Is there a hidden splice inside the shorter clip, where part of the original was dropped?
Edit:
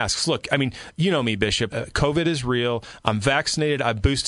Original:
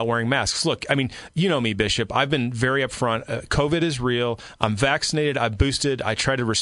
yes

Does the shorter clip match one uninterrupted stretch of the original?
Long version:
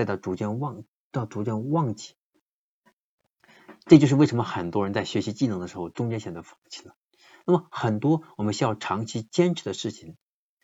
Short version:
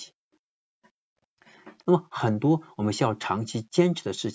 no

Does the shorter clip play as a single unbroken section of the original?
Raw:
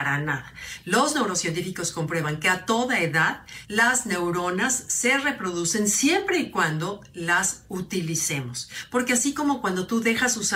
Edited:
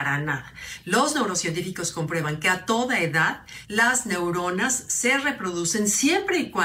yes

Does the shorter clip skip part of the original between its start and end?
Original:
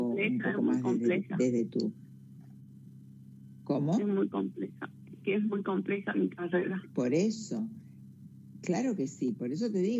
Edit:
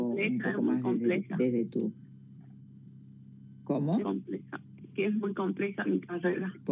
yes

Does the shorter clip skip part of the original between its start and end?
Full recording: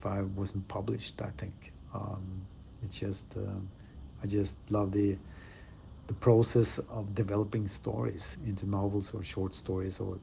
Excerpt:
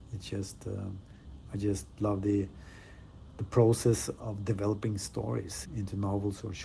no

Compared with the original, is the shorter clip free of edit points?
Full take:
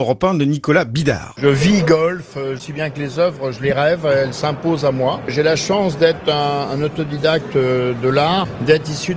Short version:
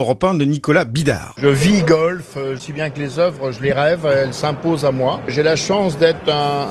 yes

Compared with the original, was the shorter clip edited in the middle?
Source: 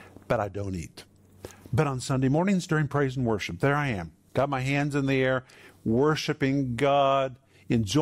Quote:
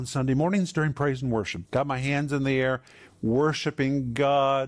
yes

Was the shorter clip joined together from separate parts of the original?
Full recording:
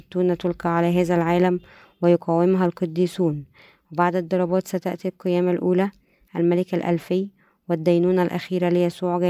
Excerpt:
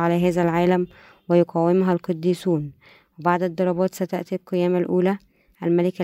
no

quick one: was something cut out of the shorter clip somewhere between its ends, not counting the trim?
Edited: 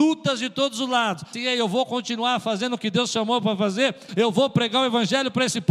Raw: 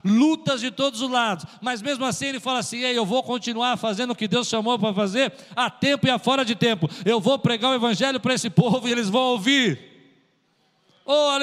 yes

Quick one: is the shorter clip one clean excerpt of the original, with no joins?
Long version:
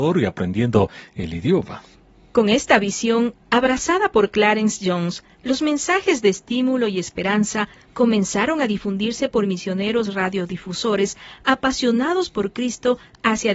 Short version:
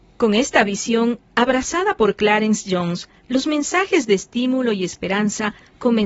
yes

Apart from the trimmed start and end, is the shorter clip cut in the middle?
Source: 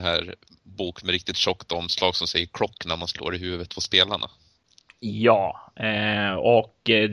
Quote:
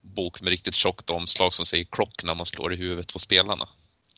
no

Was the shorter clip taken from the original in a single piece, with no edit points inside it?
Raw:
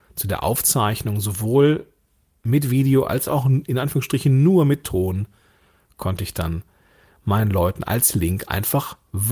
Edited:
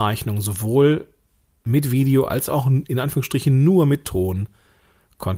yes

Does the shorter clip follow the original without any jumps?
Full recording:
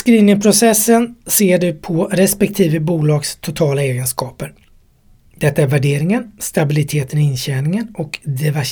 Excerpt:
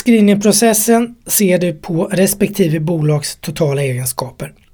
yes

